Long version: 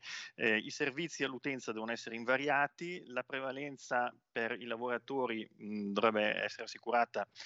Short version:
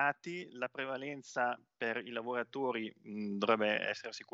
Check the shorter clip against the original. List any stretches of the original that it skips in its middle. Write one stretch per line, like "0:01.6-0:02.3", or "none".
none